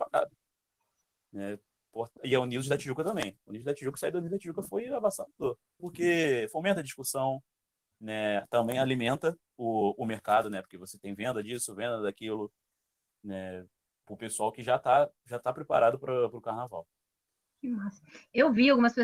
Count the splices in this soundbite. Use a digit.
1